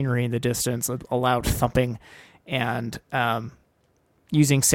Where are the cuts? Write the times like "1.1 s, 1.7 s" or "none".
none